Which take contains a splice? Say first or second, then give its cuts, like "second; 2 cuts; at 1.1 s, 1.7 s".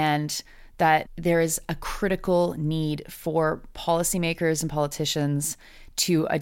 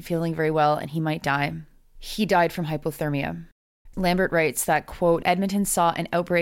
second; 2 cuts; at 3.9 s, 5.2 s